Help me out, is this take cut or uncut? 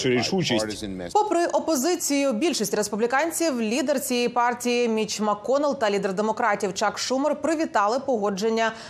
cut